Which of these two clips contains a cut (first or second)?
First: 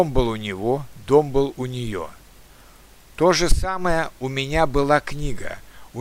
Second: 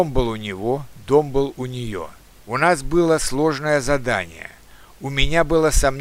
second